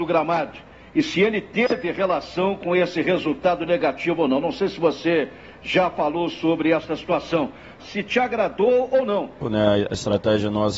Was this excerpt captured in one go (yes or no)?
no